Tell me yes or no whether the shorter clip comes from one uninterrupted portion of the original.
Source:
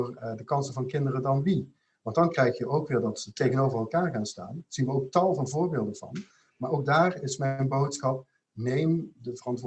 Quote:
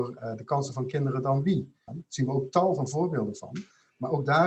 no